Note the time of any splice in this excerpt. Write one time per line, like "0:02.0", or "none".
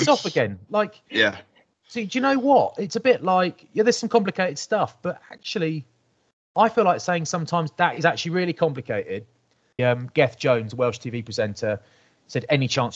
0:09.8